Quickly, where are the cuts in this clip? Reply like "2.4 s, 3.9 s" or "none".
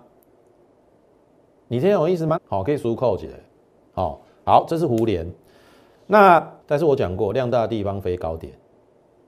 2.4 s, 6.6 s